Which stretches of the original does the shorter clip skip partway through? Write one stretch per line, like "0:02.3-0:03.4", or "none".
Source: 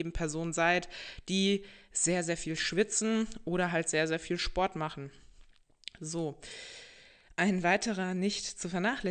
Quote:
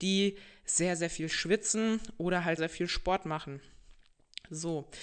0:03.8-0:04.1